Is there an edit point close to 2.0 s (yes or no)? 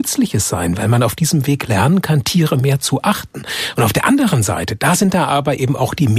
no